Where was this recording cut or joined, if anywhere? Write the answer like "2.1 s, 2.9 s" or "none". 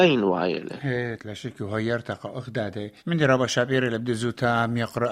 1.2 s, 3.0 s

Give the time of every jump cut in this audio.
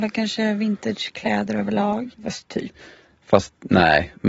2.1 s

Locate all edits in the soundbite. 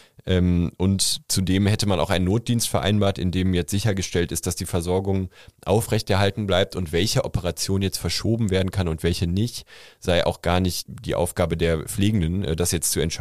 10.9 s

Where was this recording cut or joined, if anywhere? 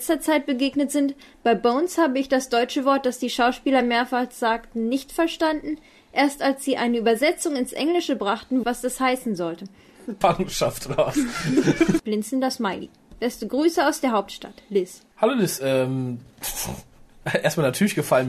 8.6 s, 10.2 s, 12.0 s

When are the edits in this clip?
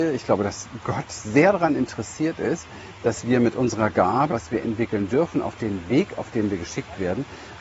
4.3 s

